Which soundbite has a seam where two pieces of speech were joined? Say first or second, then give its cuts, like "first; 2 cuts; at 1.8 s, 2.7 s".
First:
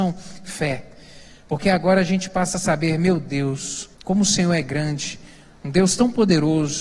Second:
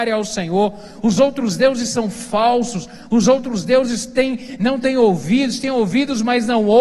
first; 1 cut; at 3.9 s